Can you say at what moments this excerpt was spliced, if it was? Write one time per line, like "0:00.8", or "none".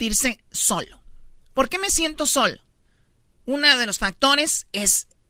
none

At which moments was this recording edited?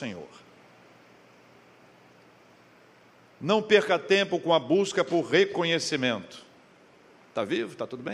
none

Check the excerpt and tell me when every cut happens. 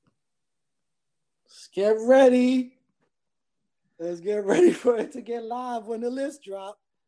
none

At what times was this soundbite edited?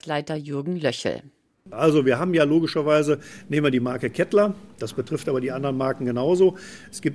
none

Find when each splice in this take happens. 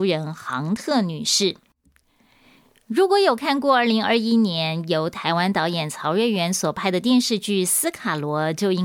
none

